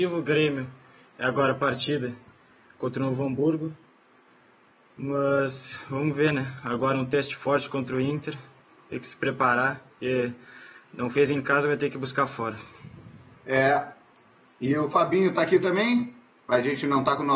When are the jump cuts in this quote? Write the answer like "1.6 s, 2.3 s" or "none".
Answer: none